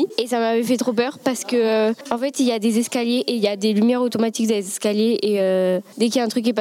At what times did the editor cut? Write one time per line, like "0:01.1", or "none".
none